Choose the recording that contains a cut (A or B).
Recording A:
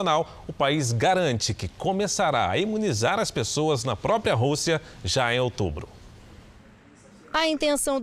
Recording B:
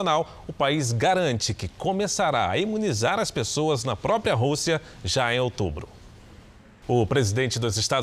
B